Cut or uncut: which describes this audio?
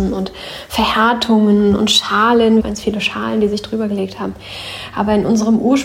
cut